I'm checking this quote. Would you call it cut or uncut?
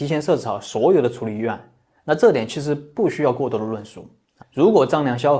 cut